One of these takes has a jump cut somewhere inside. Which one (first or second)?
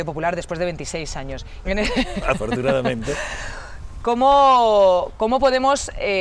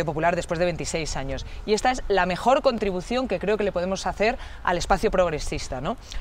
first